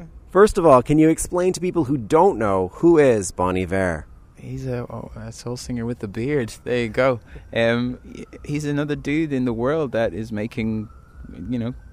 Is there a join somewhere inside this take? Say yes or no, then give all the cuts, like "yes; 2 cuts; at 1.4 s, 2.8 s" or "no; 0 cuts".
no; 0 cuts